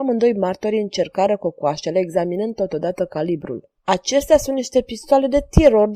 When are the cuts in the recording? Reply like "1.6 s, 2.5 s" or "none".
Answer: 3.8 s